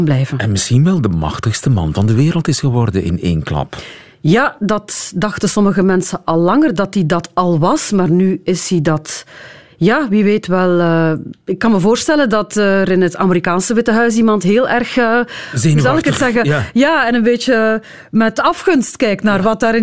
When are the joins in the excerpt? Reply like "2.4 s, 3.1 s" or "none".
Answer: none